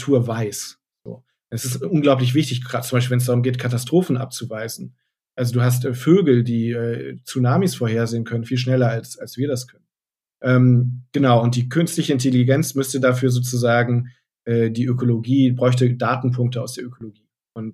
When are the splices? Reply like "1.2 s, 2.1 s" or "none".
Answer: none